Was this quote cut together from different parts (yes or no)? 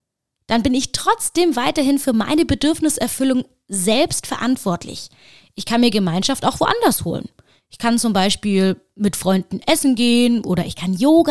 no